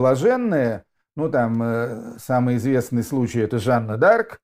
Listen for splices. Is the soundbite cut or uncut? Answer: uncut